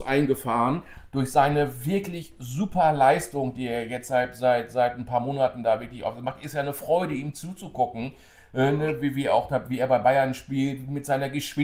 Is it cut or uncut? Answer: uncut